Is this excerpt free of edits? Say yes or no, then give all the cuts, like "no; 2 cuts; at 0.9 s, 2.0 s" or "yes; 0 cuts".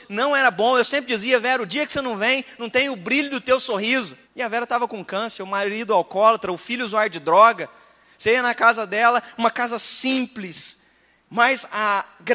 no; 1 cut; at 4.2 s